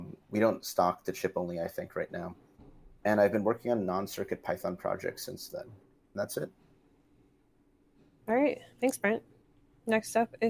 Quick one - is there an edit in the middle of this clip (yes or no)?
no